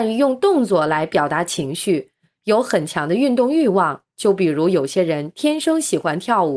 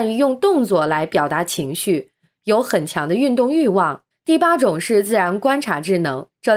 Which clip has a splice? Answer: second; 1 cut; at 4.1 s

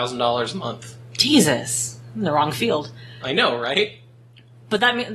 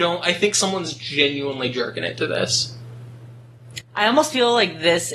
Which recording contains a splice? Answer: second; 1 cut; at 3.8 s

